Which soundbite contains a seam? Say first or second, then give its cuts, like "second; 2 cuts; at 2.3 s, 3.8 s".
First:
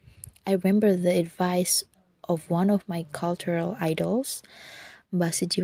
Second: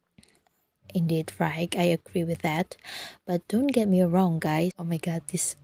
second; 1 cut; at 4.7 s